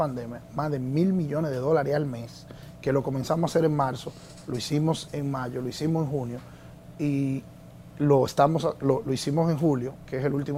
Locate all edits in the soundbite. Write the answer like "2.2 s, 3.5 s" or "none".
5.1 s